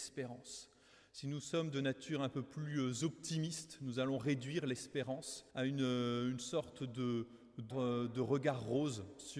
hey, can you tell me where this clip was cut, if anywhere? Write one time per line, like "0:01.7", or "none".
0:05.5
0:07.7